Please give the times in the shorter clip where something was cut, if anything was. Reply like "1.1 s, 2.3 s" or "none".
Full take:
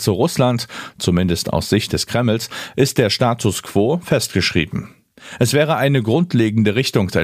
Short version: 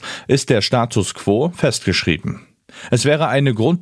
none